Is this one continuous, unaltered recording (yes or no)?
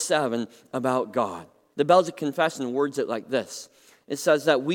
no